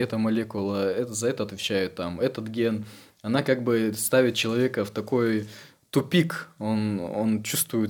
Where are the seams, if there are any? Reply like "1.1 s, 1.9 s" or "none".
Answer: none